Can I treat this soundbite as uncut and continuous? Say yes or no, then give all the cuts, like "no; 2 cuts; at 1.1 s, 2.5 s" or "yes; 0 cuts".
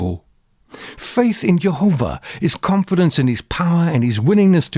yes; 0 cuts